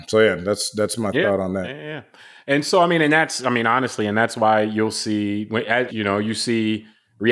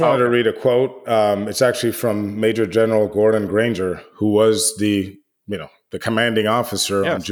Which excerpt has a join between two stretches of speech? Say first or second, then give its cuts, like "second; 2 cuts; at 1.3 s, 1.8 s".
first; 1 cut; at 5.9 s